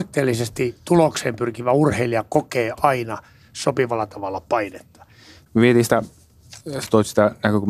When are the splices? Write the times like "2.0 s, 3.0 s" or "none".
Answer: none